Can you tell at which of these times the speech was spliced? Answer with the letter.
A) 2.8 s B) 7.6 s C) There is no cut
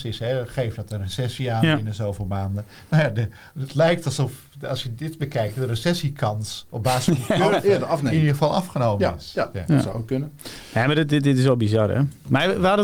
C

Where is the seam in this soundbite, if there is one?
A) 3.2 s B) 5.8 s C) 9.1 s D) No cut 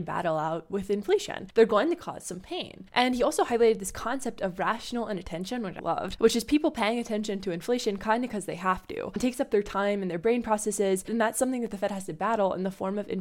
B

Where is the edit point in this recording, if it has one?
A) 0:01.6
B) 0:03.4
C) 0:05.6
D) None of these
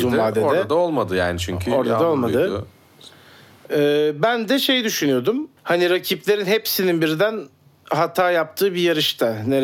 C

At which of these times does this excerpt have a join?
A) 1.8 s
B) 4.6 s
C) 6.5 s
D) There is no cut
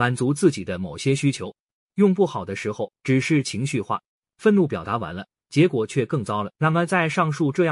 C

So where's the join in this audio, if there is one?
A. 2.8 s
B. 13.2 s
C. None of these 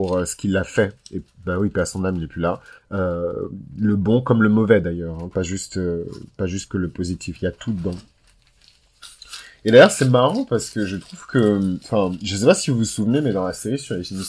A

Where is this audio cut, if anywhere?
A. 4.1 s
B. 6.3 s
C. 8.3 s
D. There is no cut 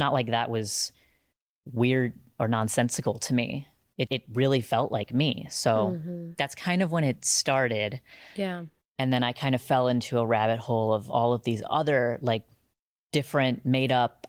A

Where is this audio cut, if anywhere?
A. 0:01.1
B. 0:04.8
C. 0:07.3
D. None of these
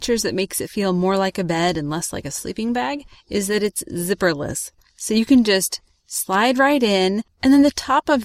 D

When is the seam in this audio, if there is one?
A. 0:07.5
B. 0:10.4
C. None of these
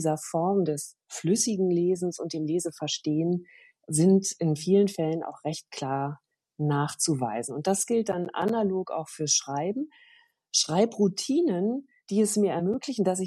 A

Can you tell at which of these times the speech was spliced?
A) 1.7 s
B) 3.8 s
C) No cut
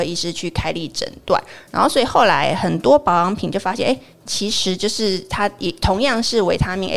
C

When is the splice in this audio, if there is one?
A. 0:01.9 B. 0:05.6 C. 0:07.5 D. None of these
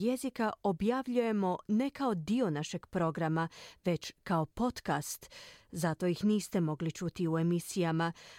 D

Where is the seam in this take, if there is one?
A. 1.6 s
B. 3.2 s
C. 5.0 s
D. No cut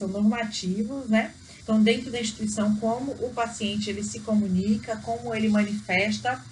A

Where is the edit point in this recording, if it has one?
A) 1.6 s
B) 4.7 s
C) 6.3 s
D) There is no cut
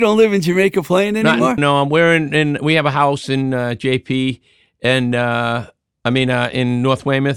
A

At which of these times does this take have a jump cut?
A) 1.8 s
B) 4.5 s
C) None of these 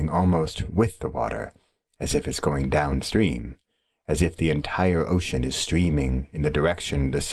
C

